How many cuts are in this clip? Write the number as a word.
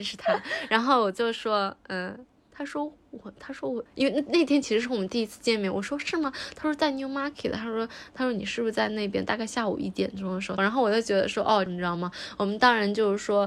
three